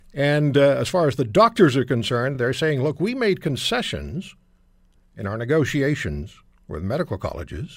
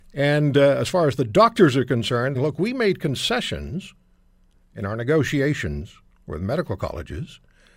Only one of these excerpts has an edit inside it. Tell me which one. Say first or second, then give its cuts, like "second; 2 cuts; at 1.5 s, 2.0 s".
second; 1 cut; at 2.3 s